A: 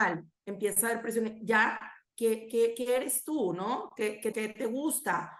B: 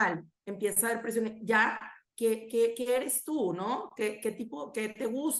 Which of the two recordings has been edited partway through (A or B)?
A